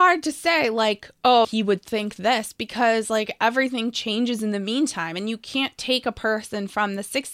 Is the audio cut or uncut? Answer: cut